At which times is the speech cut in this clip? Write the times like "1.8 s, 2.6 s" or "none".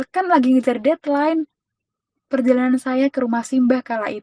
2.2 s